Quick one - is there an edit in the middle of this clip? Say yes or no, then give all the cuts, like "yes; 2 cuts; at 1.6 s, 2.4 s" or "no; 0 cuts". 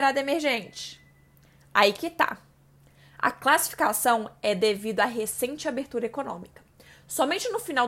no; 0 cuts